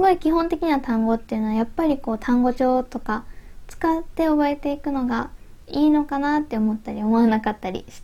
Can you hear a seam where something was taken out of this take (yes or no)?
no